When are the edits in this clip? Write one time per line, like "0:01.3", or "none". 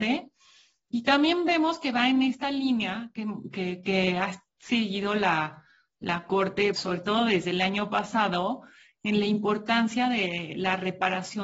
0:06.7